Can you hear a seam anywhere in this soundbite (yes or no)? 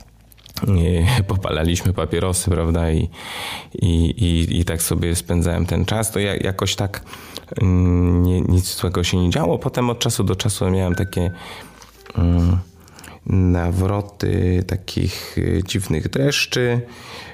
no